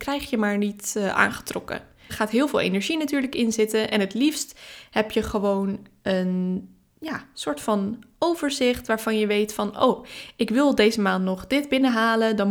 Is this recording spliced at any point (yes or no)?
yes